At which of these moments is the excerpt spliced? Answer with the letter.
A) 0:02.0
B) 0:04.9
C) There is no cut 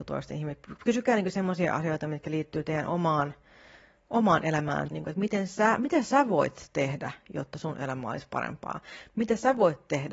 B